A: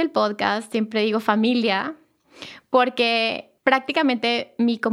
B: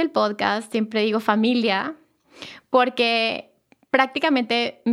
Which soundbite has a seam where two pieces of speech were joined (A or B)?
A